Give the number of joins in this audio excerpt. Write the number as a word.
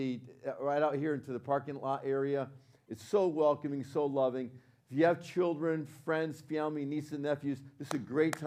zero